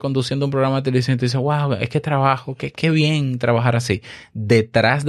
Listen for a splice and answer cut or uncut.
uncut